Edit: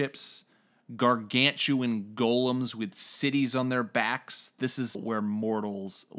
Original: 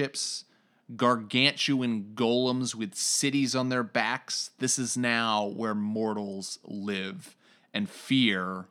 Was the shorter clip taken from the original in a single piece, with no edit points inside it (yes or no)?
no